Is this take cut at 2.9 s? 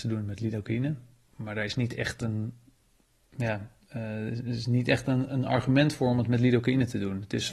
no; 0 cuts

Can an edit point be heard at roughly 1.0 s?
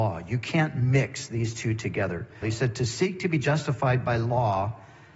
no; 1 cut; at 2.4 s

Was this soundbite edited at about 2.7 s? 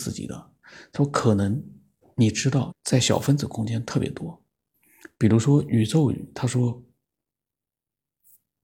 yes; 1 cut; at 2.7 s

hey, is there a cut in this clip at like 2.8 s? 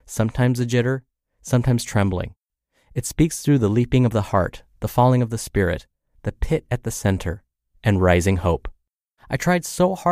no; 1 cut; at 9.2 s

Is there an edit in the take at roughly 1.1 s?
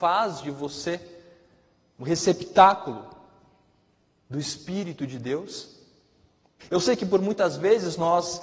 no; 1 cut; at 6.6 s

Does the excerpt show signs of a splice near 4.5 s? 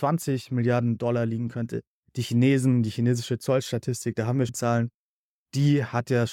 yes; 1 cut; at 4.5 s

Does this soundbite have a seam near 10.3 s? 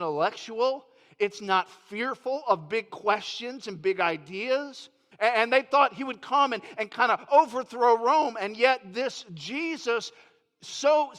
no; 1 cut; at 5.1 s

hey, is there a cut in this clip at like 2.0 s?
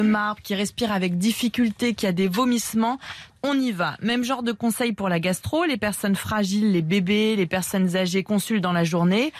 no; 1 cut; at 3.3 s

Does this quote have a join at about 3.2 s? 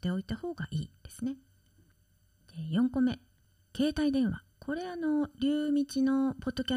no; 1 cut; at 4.5 s

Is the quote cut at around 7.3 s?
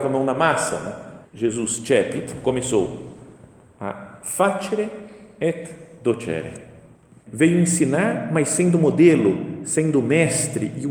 yes; 2 cuts; at 1.2 s, 7.3 s

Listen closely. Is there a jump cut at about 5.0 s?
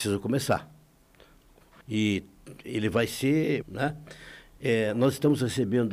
no; 2 cuts; at 1.8 s, 3.6 s

